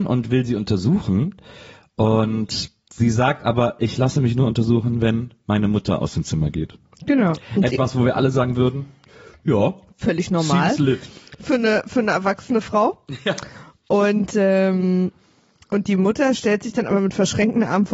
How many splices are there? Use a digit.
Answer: 0